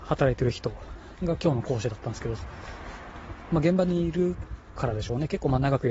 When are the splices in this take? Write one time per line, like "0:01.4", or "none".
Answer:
0:03.5